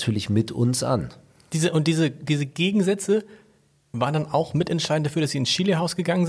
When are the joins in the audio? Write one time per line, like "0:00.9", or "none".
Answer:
none

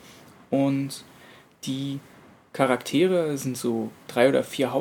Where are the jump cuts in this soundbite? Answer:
none

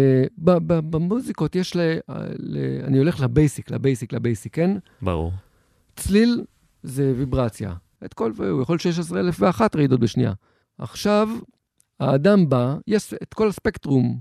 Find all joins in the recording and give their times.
0:08.0
0:10.6

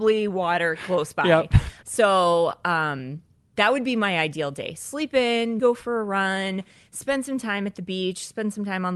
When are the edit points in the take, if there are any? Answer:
0:01.8
0:05.6

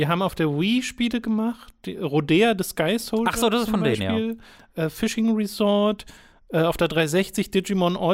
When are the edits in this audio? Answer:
none

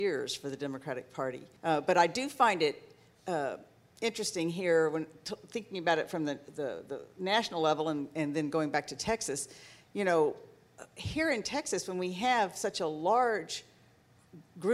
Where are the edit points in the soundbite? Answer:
0:01.6

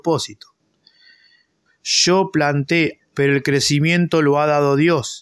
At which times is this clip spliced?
0:01.7
0:03.0

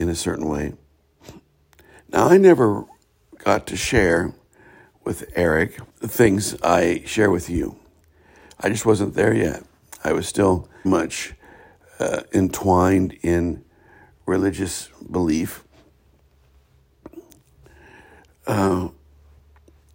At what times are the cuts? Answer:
0:05.9
0:10.8

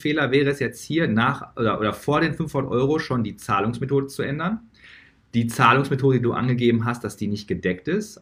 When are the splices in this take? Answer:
none

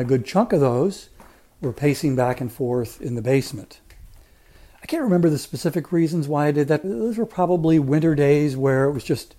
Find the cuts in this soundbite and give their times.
0:06.8

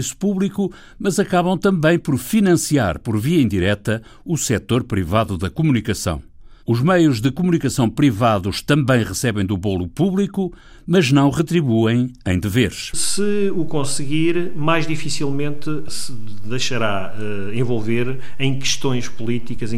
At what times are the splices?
0:12.9

